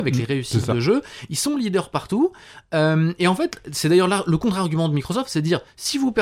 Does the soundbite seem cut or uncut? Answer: uncut